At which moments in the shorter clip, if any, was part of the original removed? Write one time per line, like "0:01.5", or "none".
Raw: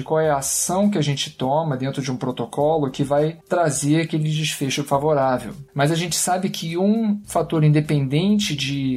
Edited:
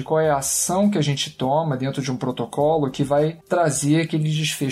none